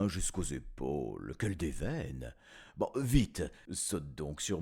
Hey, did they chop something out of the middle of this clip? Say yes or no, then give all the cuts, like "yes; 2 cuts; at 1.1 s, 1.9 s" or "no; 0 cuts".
no; 0 cuts